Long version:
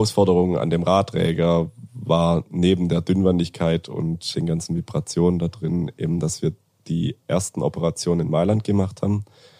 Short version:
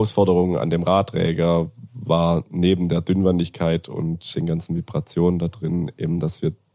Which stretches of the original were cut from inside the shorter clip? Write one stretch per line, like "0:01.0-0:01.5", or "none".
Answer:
none